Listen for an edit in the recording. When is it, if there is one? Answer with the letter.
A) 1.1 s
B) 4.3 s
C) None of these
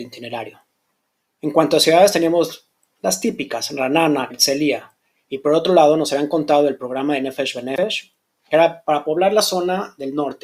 B